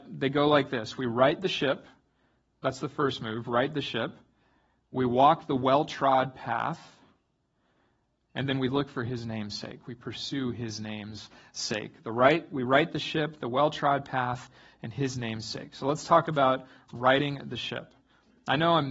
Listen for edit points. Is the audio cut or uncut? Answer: uncut